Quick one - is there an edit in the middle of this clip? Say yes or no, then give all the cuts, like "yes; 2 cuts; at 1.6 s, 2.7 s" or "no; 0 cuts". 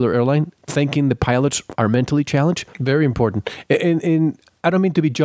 yes; 1 cut; at 2.7 s